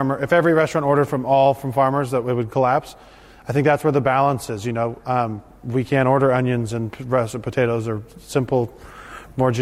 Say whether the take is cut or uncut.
uncut